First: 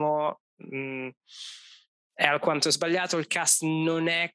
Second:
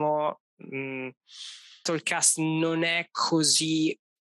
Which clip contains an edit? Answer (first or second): second